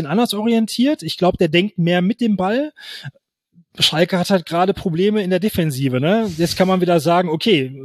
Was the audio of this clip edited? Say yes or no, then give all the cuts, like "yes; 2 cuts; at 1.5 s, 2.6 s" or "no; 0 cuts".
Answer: no; 0 cuts